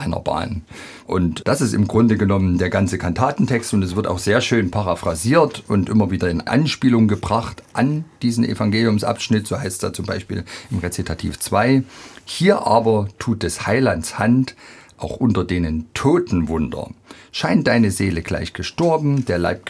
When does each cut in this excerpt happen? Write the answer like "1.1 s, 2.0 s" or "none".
none